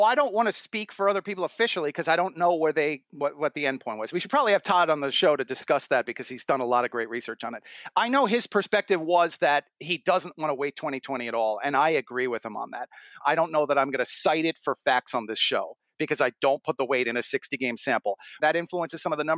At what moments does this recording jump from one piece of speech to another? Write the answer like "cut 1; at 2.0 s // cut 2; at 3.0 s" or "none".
cut 1; at 13.2 s // cut 2; at 18.4 s